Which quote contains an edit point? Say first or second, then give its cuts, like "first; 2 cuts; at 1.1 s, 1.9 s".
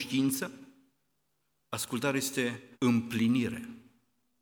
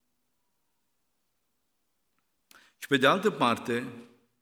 first; 1 cut; at 2.7 s